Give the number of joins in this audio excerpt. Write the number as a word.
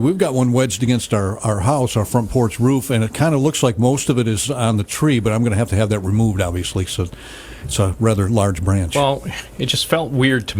zero